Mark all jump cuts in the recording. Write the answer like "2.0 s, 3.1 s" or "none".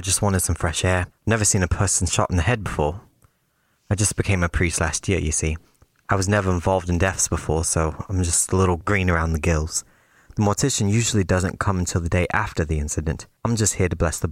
13.4 s